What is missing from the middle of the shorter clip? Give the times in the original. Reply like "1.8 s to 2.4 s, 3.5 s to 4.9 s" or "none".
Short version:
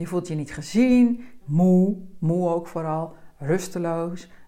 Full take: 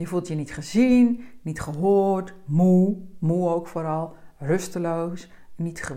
1.4 s to 2.4 s